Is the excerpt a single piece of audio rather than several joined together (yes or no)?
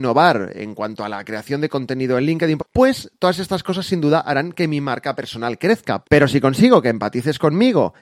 no